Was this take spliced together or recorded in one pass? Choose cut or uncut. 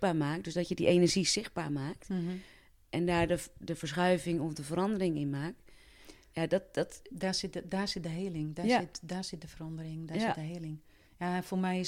uncut